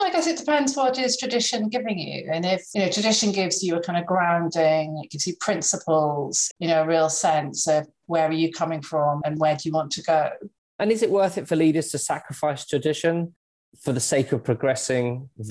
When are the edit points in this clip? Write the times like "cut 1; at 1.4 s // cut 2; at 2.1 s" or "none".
cut 1; at 6.5 s // cut 2; at 10.6 s